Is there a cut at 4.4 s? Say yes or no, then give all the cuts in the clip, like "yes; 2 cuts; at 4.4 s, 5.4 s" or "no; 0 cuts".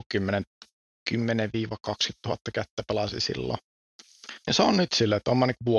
yes; 1 cut; at 4.4 s